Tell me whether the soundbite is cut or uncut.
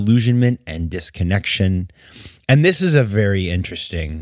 uncut